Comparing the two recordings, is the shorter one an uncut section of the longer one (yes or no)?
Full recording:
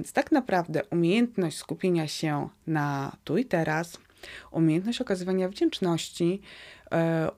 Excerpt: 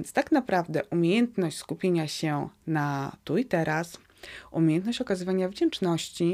yes